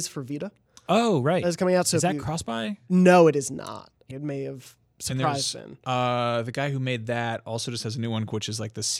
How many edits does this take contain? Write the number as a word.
one